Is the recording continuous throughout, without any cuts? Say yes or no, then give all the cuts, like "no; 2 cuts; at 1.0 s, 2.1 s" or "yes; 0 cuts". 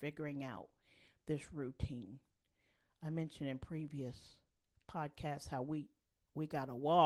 yes; 0 cuts